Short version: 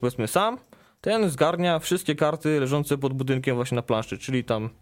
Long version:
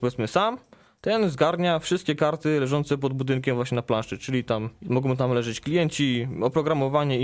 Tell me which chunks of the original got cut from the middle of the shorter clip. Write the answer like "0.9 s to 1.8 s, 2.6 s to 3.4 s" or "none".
none